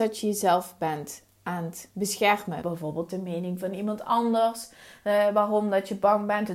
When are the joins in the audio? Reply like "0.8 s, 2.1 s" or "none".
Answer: 2.6 s

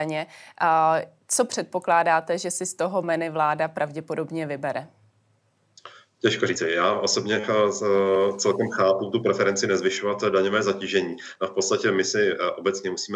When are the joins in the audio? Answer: none

